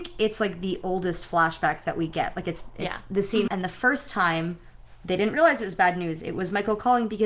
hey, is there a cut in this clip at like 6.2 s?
no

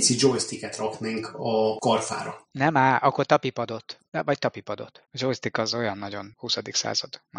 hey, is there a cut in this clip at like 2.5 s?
no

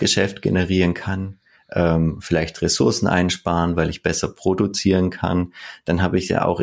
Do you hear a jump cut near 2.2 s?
no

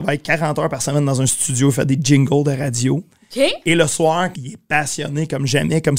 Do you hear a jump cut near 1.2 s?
no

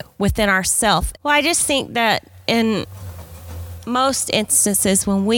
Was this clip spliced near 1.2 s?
yes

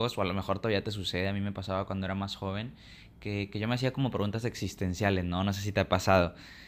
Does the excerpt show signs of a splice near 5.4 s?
no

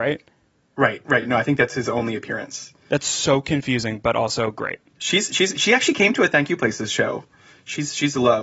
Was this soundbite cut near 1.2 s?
no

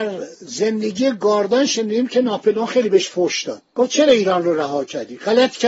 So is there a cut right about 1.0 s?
no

